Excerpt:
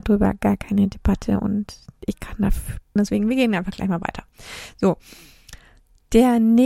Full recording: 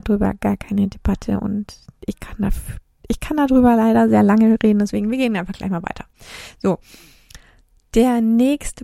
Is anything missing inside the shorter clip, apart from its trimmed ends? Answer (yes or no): yes